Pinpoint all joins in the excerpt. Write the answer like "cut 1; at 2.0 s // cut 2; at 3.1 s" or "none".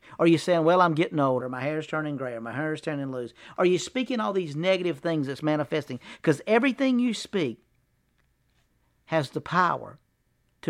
cut 1; at 1.4 s